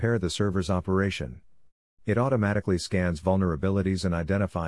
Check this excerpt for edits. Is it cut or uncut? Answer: cut